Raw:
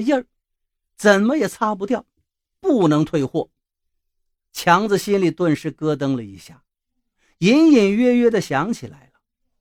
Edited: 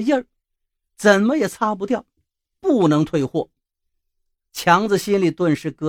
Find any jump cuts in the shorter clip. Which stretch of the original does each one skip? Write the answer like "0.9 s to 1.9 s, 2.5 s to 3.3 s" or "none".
none